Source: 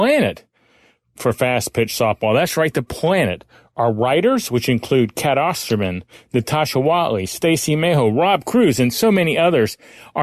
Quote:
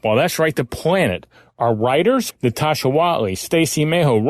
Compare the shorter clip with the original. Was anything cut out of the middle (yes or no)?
yes